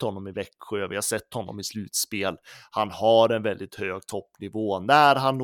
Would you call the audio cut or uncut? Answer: uncut